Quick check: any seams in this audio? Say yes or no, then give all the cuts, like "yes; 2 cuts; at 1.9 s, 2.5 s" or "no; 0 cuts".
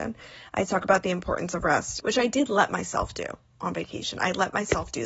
yes; 1 cut; at 2.0 s